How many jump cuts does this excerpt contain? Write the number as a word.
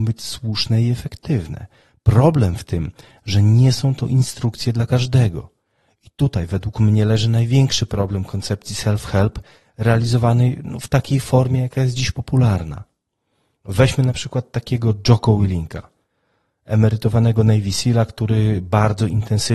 zero